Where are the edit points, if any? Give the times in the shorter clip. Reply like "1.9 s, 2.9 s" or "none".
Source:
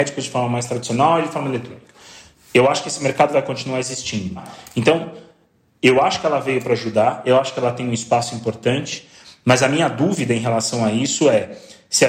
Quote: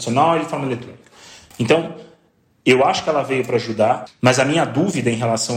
1.5 s, 4.1 s